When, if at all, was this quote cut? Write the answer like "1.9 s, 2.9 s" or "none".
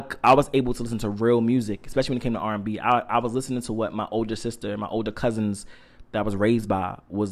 none